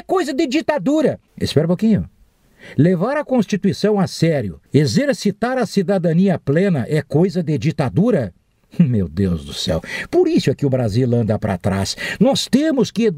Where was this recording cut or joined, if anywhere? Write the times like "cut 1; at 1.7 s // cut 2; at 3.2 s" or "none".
cut 1; at 1.3 s // cut 2; at 4.7 s